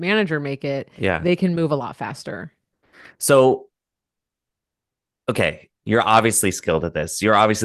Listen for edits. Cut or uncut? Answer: uncut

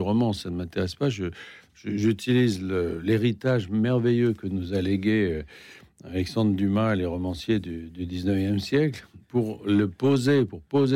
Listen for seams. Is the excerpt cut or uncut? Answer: uncut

